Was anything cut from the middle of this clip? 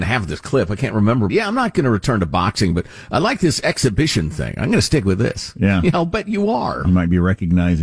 yes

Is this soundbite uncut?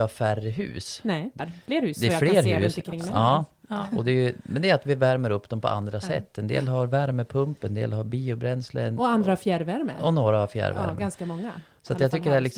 no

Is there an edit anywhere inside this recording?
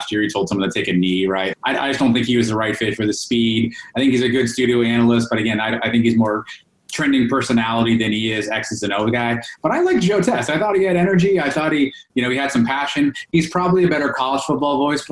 yes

